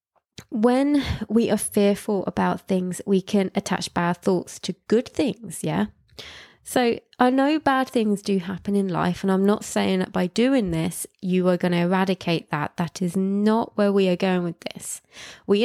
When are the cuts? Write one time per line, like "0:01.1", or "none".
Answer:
none